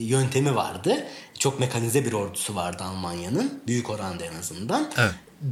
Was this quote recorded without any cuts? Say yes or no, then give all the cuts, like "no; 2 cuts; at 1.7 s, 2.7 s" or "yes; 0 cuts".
yes; 0 cuts